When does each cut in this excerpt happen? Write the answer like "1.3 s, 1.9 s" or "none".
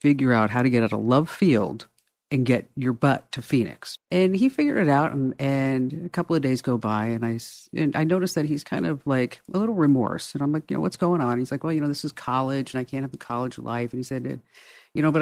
4.0 s